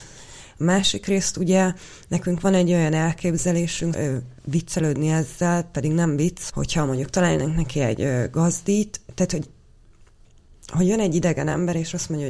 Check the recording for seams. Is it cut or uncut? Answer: cut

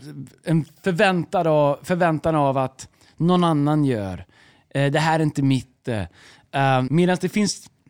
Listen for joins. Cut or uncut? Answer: cut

